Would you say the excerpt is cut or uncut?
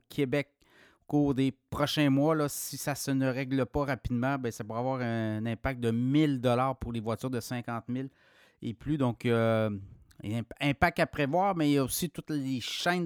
uncut